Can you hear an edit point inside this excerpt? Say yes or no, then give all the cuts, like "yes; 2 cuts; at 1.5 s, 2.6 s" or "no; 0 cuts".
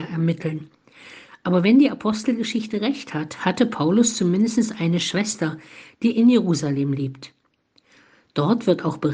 no; 0 cuts